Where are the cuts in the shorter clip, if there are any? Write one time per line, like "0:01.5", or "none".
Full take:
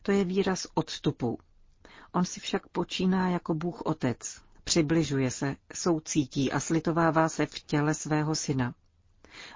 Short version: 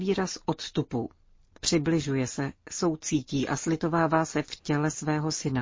0:01.6